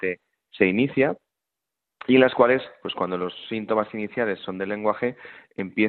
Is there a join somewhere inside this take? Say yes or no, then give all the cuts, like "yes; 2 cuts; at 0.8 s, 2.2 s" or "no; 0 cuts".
no; 0 cuts